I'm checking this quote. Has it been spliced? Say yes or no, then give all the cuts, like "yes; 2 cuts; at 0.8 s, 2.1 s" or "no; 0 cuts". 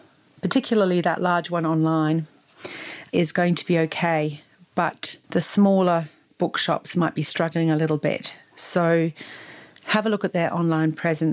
yes; 1 cut; at 5.2 s